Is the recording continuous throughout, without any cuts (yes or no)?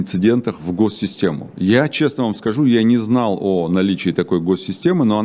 yes